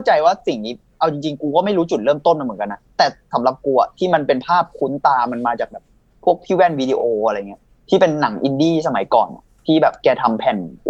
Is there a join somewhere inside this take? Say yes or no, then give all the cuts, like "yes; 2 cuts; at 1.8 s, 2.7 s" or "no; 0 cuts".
no; 0 cuts